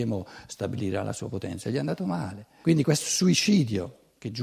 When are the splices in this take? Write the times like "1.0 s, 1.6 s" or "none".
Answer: 2.6 s